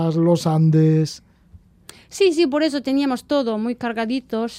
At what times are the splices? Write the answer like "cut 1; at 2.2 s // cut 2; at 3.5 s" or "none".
none